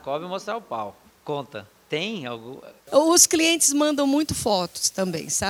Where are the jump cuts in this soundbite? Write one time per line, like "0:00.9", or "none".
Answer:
0:02.8